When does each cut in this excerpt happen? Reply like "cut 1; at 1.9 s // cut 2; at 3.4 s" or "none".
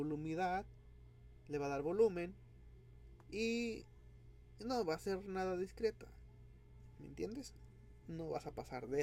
none

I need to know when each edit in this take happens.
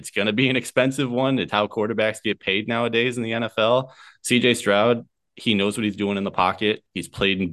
cut 1; at 1.5 s // cut 2; at 4.2 s

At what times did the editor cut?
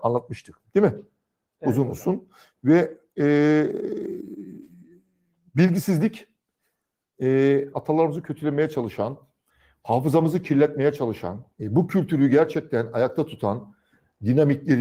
cut 1; at 7.7 s // cut 2; at 11.5 s

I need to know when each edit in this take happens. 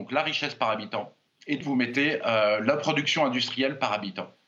cut 1; at 1.6 s

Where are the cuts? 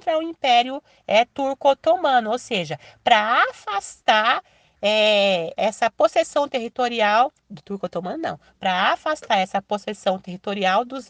cut 1; at 5.6 s // cut 2; at 7.4 s

